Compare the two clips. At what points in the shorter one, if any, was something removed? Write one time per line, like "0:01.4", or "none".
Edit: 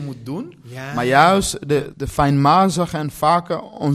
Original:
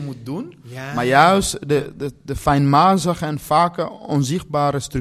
0:01.9